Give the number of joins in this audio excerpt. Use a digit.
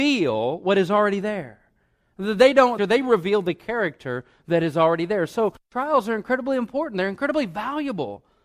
1